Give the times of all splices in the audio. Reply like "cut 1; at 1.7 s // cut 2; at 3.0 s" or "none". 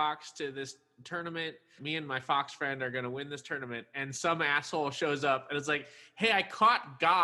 cut 1; at 1.8 s